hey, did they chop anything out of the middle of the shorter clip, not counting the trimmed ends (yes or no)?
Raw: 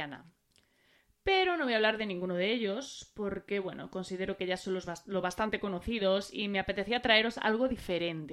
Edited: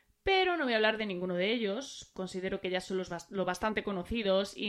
yes